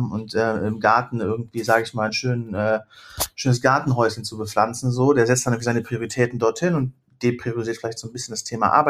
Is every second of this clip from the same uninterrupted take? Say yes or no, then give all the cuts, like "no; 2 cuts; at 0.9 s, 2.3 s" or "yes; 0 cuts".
yes; 0 cuts